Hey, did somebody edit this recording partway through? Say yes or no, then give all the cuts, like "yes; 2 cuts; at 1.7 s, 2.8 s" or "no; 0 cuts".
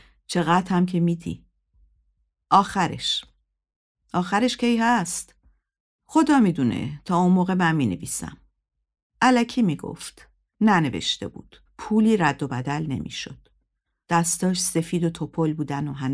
yes; 2 cuts; at 11.7 s, 14.0 s